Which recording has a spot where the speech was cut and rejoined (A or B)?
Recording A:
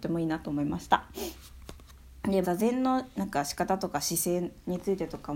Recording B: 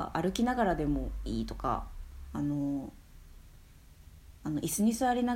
A